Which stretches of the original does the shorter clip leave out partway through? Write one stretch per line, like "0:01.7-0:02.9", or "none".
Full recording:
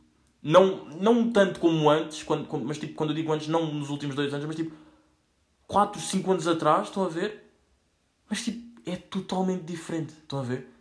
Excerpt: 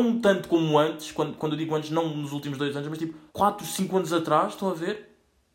0:02.5-0:02.9
0:04.8-0:05.6